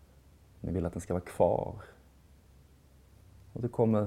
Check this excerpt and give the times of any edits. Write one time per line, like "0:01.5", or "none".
none